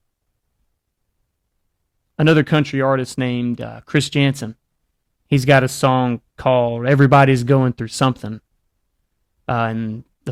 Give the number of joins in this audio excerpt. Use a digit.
0